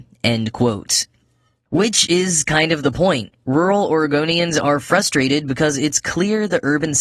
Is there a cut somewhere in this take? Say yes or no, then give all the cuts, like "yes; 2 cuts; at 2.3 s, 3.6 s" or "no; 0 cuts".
no; 0 cuts